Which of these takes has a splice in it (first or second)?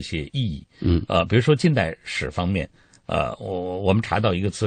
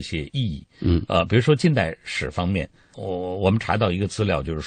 second